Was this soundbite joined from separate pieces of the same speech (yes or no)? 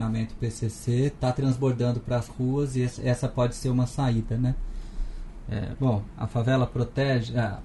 yes